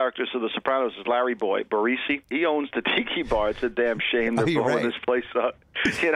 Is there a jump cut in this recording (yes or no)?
yes